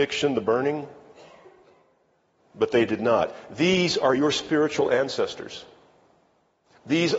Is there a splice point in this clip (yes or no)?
no